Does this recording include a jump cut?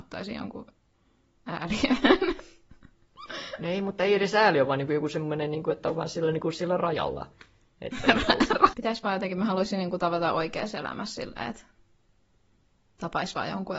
yes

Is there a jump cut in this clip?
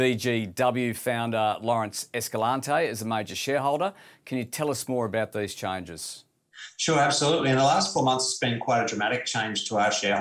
no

